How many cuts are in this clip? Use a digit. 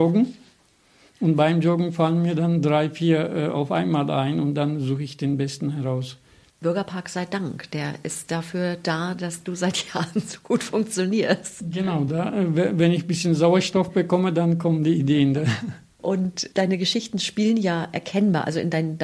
0